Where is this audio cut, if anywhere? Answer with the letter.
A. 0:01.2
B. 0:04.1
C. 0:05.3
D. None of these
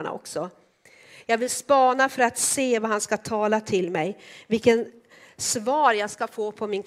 A